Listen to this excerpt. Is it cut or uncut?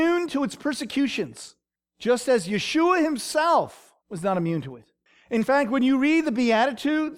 cut